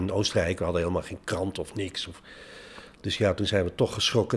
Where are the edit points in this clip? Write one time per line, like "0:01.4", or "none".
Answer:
none